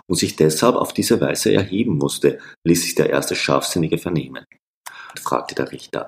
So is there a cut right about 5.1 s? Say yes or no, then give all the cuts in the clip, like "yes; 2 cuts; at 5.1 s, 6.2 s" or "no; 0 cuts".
yes; 1 cut; at 5.1 s